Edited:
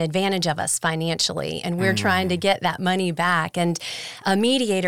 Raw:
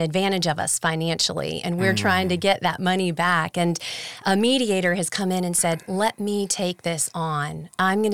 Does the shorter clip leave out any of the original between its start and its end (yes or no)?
no